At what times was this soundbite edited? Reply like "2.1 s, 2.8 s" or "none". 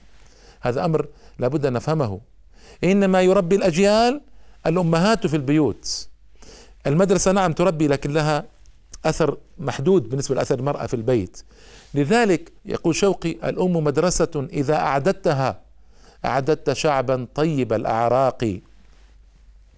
12.6 s

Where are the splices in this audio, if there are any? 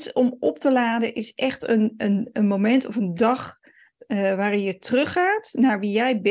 none

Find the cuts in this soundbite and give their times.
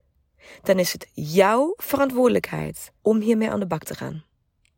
3.0 s

